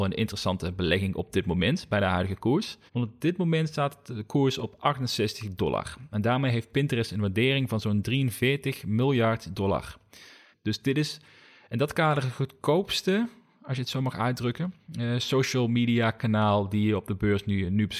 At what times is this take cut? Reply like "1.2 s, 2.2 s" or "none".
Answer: 2.9 s, 10.5 s